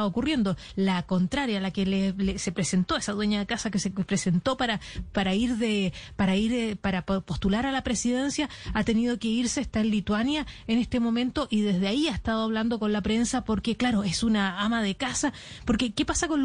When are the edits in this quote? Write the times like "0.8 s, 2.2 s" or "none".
none